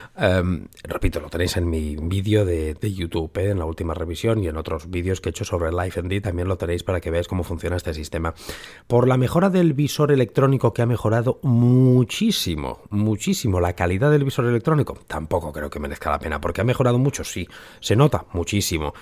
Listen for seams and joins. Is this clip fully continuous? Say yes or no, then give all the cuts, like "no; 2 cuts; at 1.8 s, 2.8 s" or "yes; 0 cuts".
no; 1 cut; at 8.8 s